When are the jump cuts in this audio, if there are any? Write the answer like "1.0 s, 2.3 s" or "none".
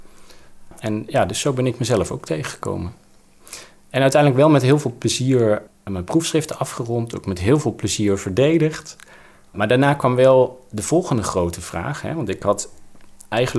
none